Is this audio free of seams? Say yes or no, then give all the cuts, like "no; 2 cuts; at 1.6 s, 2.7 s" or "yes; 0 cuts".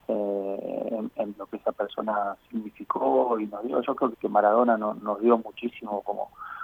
no; 2 cuts; at 1.3 s, 4.1 s